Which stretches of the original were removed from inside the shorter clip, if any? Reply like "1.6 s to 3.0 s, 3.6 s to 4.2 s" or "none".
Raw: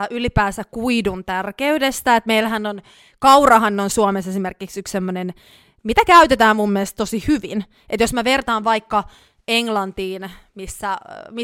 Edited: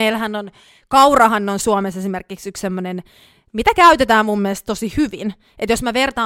none